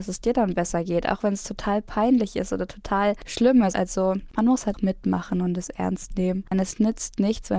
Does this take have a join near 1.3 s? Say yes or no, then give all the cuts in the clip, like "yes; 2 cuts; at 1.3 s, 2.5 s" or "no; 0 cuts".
no; 3 cuts; at 3.7 s, 4.7 s, 6.5 s